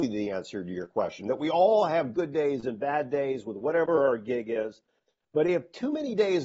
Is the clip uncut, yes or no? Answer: yes